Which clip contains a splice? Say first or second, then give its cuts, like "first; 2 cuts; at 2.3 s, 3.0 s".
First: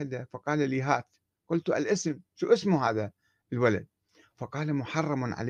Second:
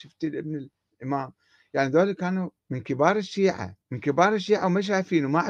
second; 2 cuts; at 2.6 s, 3.8 s